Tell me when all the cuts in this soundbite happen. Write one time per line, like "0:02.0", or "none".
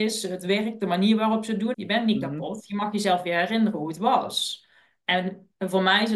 0:01.7